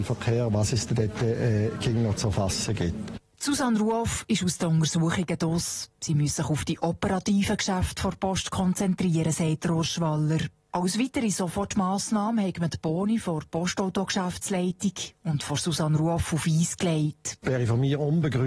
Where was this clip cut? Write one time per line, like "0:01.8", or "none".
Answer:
none